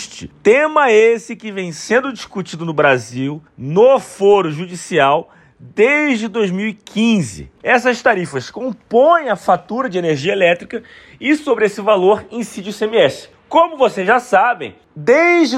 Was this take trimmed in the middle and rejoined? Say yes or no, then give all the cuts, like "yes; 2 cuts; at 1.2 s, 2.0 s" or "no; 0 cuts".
yes; 1 cut; at 7.6 s